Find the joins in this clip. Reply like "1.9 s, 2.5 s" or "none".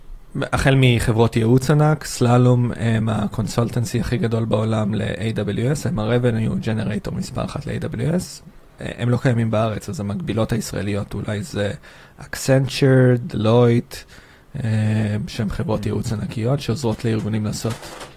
none